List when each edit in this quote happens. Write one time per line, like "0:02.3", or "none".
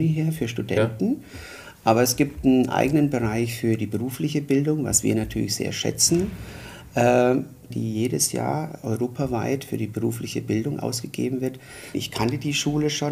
0:07.7
0:11.9